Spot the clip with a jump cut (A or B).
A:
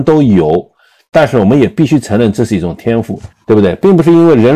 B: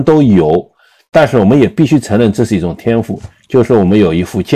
A